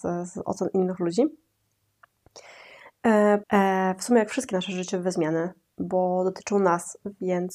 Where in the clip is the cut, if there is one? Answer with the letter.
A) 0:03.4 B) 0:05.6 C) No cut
A